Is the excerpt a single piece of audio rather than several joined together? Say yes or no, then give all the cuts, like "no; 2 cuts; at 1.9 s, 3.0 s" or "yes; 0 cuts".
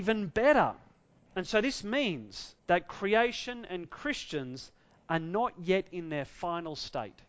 no; 2 cuts; at 1.3 s, 2.6 s